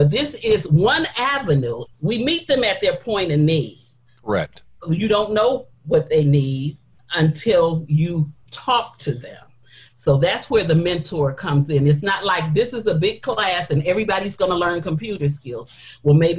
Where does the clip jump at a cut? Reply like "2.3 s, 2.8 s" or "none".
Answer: 1.9 s

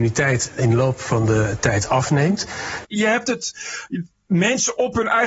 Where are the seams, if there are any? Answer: 2.8 s

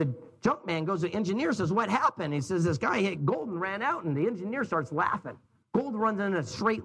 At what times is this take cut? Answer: 5.6 s

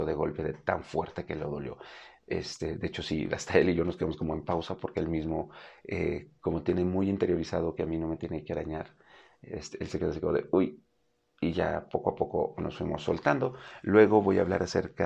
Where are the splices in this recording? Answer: none

